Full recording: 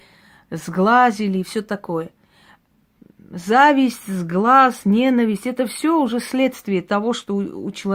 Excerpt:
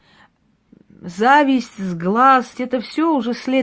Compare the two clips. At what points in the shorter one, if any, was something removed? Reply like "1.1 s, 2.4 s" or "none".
2.5 s